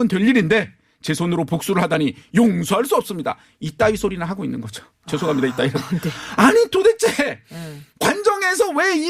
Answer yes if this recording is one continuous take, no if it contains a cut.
yes